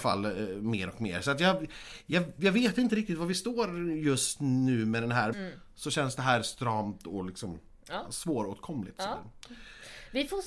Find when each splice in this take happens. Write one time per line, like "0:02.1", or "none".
0:05.3